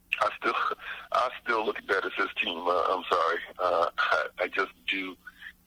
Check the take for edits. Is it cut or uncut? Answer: uncut